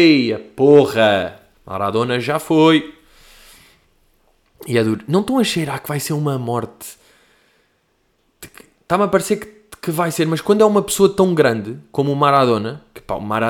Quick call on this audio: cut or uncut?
cut